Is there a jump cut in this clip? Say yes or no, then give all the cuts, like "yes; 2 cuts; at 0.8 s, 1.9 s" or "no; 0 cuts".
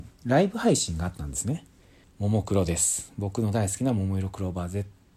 yes; 1 cut; at 2.0 s